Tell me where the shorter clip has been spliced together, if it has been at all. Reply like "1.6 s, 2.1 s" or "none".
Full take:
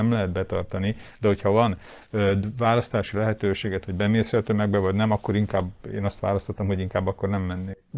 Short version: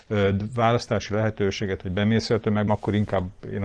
2.7 s